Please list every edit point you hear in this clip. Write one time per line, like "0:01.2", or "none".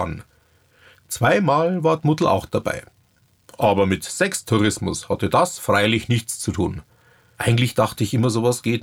none